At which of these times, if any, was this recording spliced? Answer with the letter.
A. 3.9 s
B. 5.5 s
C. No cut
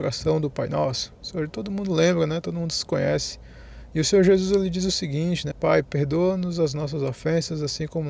B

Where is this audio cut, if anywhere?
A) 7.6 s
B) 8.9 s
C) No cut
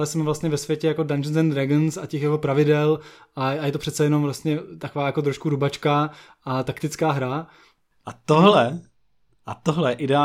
C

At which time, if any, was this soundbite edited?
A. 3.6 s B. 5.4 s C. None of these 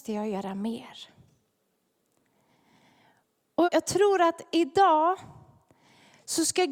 A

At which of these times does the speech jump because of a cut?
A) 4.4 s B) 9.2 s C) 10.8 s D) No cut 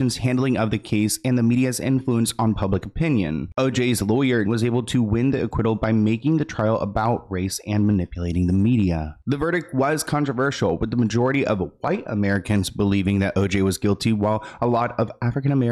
A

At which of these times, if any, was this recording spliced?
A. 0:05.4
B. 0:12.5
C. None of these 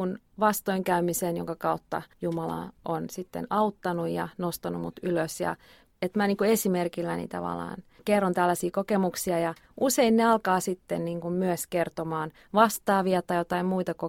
C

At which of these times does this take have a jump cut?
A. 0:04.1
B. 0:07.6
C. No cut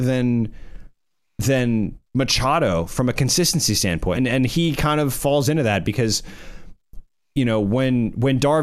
A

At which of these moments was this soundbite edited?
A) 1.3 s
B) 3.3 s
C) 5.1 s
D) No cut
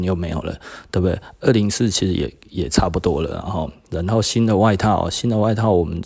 D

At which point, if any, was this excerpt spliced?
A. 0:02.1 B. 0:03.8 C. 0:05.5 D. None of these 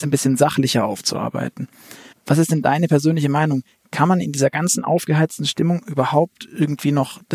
A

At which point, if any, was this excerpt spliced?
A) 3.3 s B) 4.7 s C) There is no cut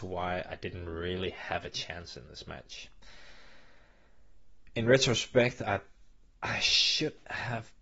C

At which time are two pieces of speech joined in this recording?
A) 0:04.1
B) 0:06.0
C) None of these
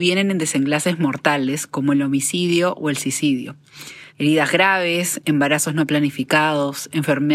A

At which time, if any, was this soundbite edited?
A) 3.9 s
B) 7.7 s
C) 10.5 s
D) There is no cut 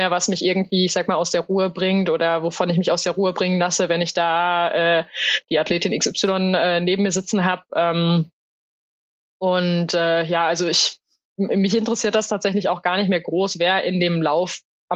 D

